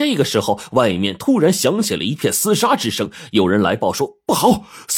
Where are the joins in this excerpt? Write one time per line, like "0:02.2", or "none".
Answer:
none